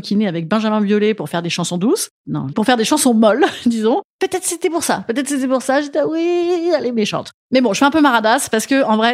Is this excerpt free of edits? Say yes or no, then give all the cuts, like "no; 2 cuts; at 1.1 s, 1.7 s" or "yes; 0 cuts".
no; 1 cut; at 2.5 s